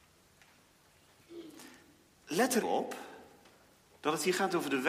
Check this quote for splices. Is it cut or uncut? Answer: cut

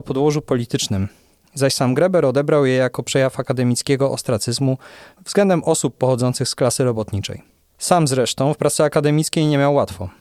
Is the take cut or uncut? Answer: cut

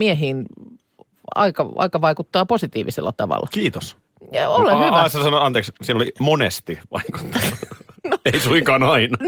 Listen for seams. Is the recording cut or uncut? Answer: uncut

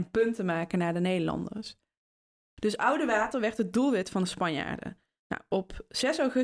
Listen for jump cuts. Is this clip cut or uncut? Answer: uncut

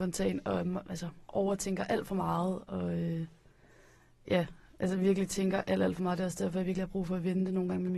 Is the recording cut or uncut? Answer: uncut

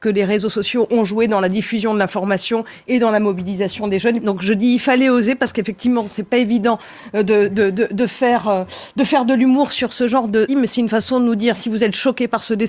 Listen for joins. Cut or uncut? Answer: cut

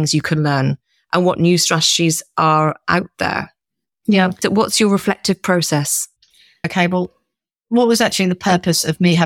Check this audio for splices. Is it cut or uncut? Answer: cut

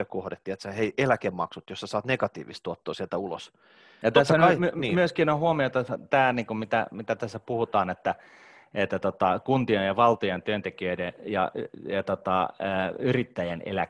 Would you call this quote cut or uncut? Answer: uncut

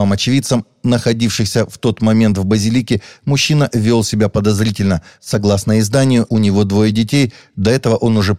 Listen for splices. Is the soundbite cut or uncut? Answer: cut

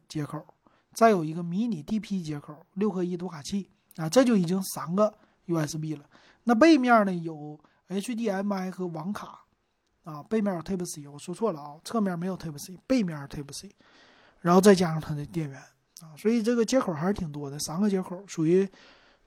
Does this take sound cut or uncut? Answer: uncut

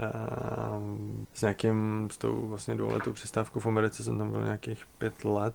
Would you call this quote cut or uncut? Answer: cut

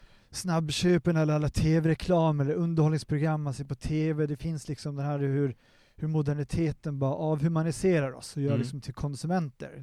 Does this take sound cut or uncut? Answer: cut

